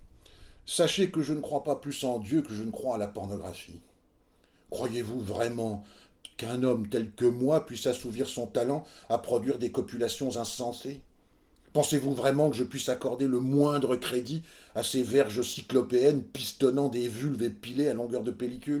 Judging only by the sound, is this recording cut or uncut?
uncut